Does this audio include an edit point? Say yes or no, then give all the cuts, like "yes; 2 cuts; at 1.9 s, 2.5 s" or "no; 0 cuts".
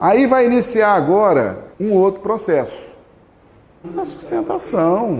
yes; 2 cuts; at 1.7 s, 3.8 s